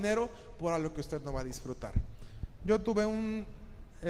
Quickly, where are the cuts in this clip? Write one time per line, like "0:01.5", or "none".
0:02.6